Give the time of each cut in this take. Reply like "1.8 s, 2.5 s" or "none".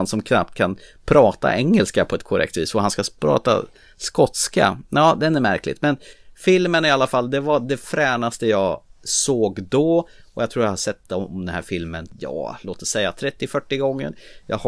none

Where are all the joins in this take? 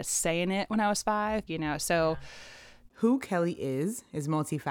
1.5 s, 2.9 s

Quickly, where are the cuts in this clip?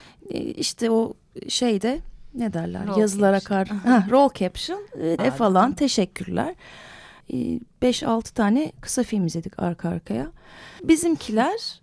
5.2 s, 7.2 s, 10.8 s

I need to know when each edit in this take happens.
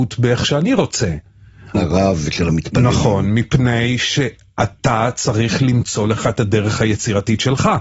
1.7 s

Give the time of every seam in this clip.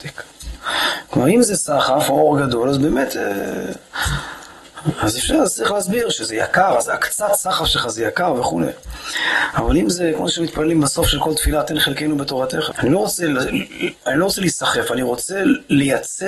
12.7 s

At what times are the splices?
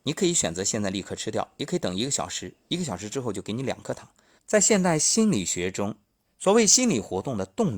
4.4 s, 6.2 s

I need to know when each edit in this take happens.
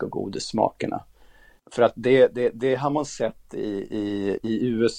none

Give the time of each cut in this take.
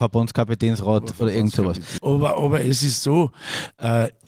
2.0 s

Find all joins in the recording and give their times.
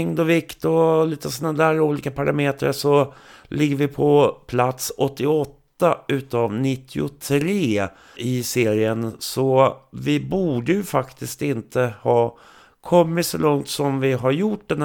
8.2 s

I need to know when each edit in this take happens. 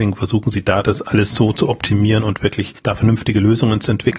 none

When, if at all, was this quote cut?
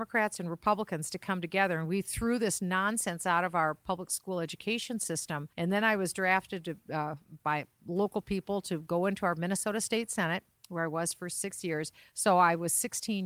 5.5 s, 12.0 s

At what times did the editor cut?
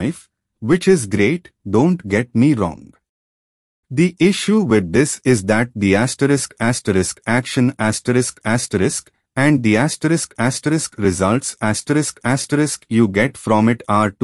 none

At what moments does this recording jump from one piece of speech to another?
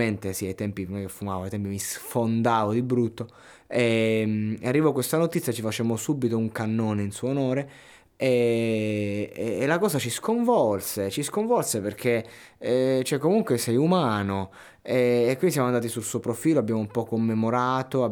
none

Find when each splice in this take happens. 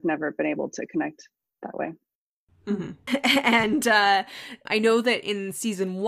3.1 s, 4.7 s

